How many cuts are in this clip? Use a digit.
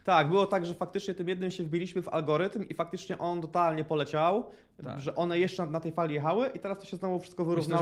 1